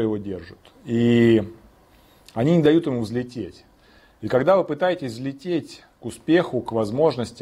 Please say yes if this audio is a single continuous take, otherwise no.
yes